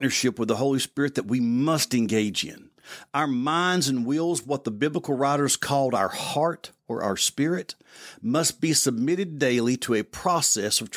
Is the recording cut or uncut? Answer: uncut